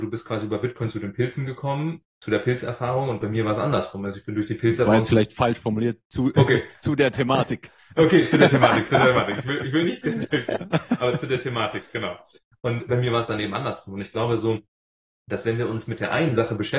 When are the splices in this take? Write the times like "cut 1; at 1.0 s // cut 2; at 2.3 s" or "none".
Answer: none